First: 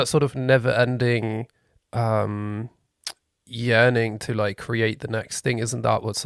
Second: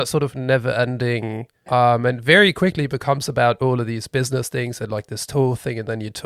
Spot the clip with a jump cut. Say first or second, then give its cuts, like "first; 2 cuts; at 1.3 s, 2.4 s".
second; 1 cut; at 1.7 s